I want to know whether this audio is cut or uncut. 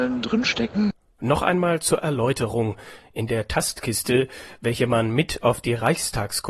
uncut